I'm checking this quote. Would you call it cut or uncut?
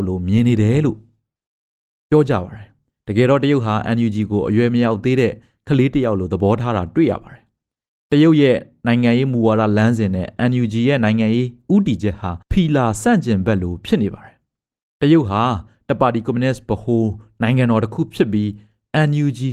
cut